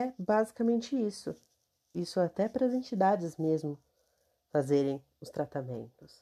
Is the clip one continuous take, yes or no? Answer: no